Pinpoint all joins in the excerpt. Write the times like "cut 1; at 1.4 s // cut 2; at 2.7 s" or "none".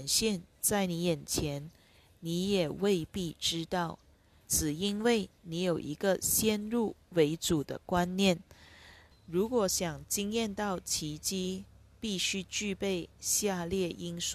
cut 1; at 4.4 s // cut 2; at 9.1 s